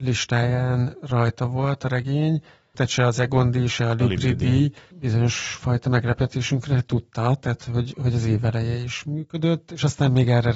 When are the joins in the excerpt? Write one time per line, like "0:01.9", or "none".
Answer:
0:02.7
0:04.9